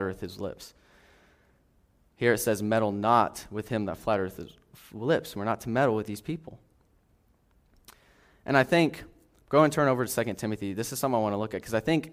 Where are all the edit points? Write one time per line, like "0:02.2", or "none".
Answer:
none